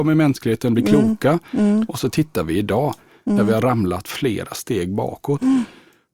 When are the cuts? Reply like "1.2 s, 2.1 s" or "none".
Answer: none